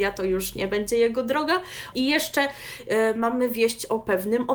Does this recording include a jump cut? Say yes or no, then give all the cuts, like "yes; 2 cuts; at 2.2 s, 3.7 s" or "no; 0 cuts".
yes; 1 cut; at 1.9 s